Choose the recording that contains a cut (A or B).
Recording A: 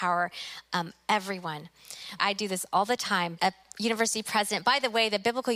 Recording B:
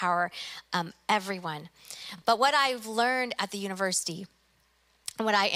A